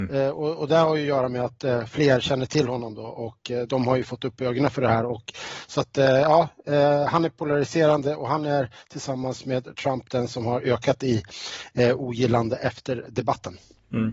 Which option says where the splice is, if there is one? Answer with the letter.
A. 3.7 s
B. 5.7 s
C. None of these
A